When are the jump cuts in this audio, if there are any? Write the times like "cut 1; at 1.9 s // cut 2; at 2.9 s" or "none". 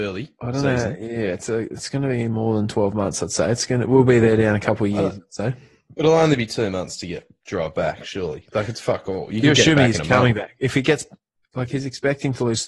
none

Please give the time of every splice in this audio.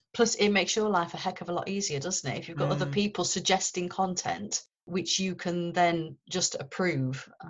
none

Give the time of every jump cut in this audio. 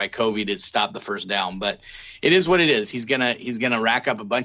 cut 1; at 2.9 s

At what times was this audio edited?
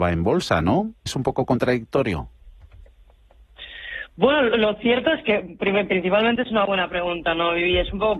cut 1; at 1.1 s

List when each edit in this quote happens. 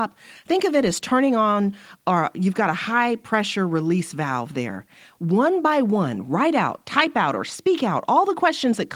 none

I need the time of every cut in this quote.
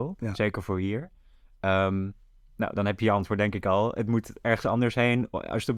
none

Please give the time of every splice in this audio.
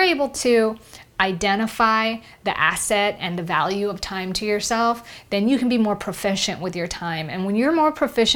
none

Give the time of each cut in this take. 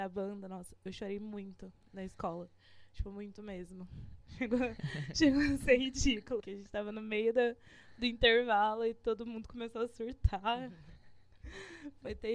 cut 1; at 6.4 s

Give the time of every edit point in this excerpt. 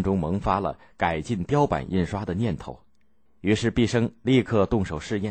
cut 1; at 3.3 s

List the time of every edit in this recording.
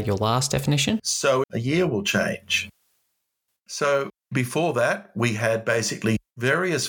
cut 1; at 1.4 s // cut 2; at 3.5 s

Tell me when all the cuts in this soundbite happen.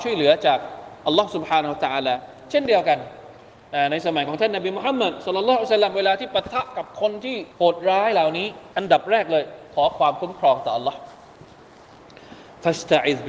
cut 1; at 7.5 s // cut 2; at 8.7 s

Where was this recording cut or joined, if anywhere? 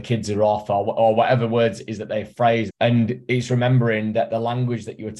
cut 1; at 2.7 s

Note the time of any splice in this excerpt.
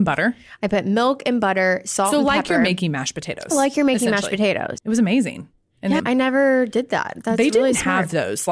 cut 1; at 4.8 s // cut 2; at 6.0 s

